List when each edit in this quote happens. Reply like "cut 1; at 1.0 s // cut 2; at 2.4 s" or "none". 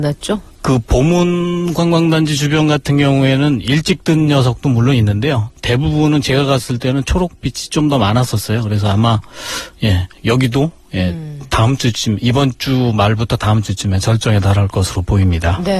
none